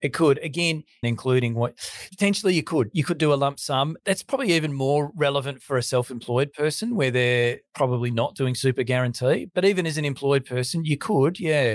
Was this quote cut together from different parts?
yes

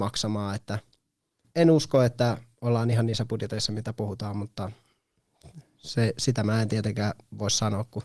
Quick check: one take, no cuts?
no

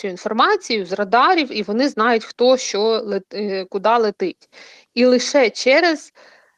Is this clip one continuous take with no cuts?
yes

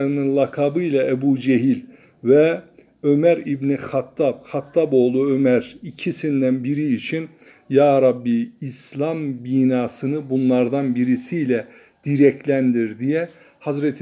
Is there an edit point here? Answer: no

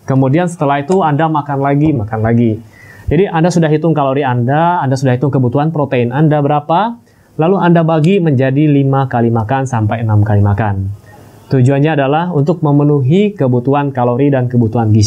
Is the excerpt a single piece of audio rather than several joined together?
no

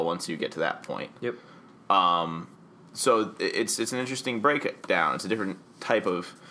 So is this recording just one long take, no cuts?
yes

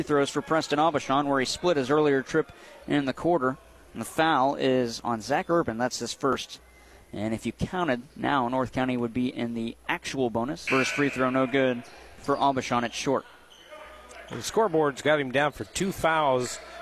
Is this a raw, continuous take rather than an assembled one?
no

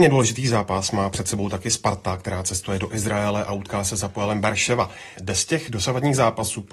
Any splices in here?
yes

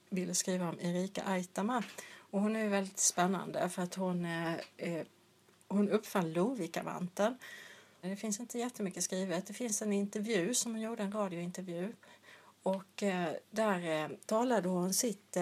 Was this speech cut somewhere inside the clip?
yes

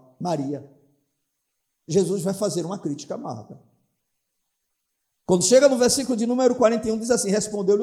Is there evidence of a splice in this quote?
no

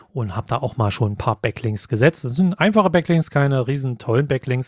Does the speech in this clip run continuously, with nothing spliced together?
yes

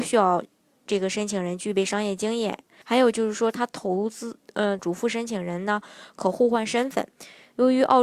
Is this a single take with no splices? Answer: no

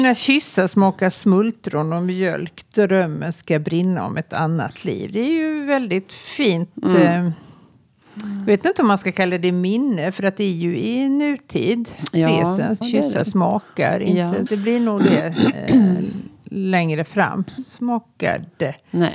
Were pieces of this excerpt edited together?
yes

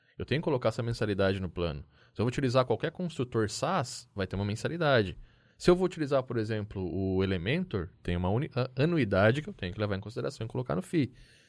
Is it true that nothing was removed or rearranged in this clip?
yes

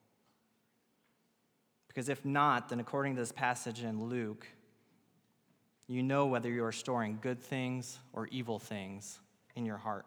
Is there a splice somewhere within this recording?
no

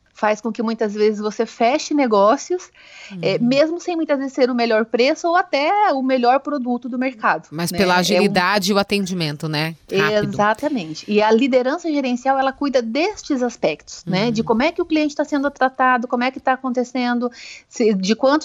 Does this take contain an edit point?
no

